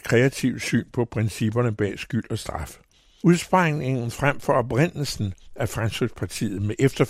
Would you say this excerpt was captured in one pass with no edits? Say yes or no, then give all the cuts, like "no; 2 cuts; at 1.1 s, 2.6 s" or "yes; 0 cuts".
no; 1 cut; at 3.2 s